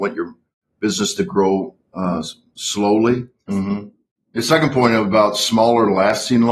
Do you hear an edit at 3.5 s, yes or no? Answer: yes